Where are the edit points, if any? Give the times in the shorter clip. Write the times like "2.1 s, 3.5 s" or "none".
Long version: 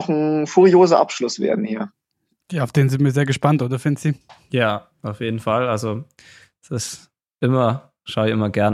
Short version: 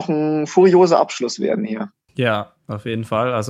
2.1 s

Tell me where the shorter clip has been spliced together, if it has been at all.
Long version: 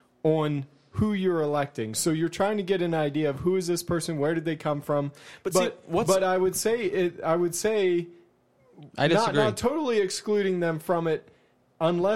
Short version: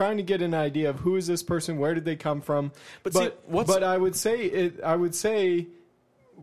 none

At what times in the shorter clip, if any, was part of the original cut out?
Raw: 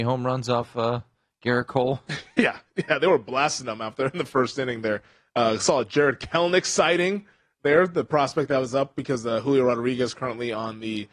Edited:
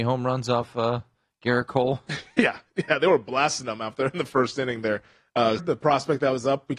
5.6 s

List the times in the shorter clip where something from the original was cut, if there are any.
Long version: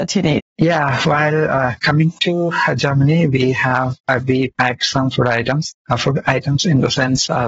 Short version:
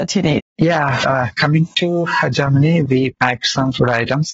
1.0 s, 2.9 s

